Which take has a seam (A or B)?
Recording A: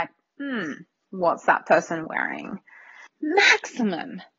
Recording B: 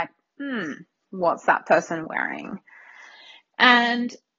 A